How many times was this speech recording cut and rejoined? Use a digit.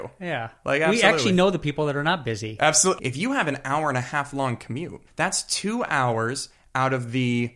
2